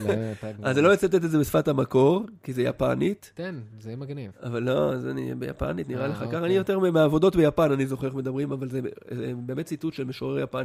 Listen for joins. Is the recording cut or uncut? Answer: uncut